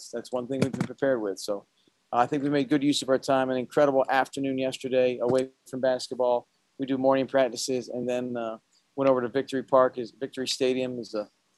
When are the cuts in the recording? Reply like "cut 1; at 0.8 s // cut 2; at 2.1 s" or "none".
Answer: none